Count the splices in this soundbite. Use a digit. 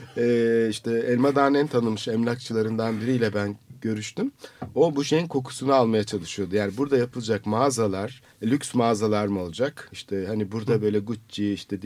1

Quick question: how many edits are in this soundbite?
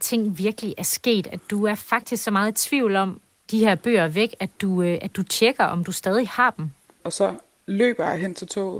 1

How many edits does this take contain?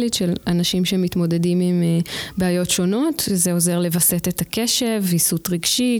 0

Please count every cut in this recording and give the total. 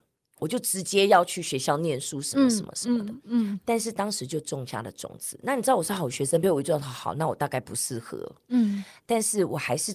1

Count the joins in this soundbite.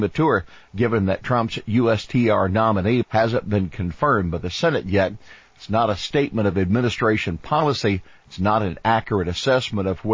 1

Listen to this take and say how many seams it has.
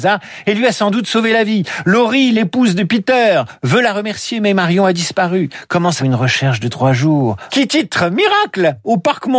2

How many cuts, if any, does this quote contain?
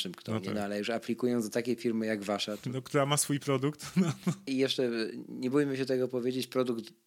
0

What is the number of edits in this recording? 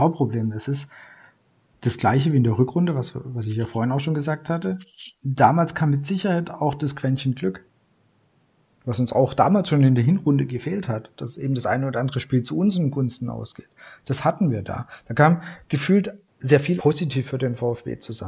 1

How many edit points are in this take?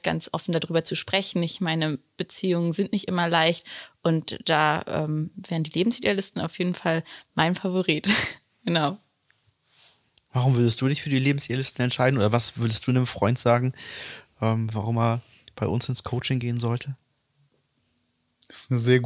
1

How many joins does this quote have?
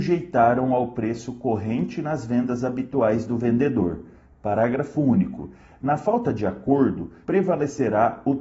1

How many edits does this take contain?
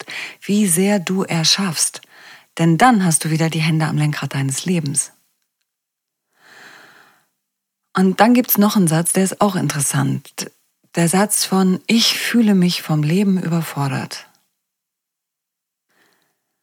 0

